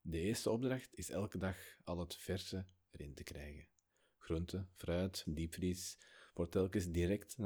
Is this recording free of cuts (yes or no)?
no